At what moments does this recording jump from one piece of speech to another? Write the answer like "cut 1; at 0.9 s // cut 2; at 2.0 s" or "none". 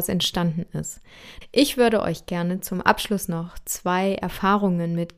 cut 1; at 1.4 s